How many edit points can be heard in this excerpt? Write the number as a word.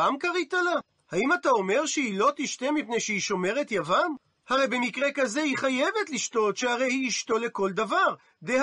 one